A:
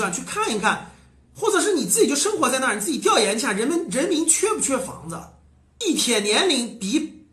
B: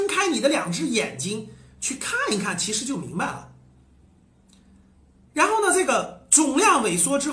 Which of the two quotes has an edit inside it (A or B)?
A